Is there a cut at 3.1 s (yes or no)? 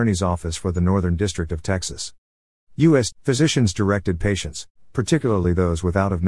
yes